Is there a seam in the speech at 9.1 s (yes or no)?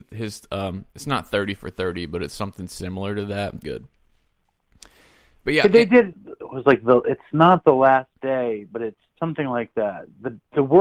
yes